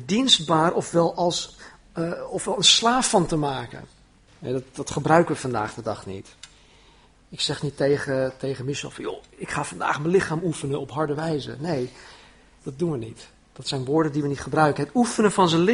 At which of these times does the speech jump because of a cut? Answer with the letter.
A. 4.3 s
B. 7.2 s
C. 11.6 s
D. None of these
A